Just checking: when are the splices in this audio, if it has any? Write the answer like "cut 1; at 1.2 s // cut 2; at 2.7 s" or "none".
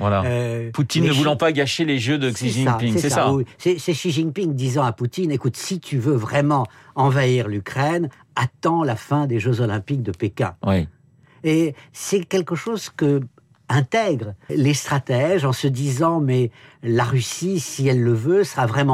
cut 1; at 14.5 s